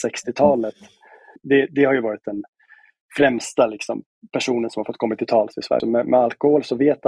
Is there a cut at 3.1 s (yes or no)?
no